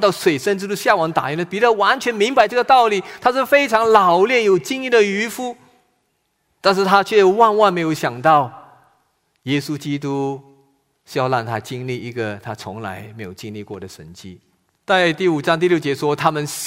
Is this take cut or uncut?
cut